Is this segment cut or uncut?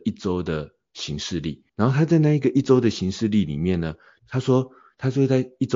cut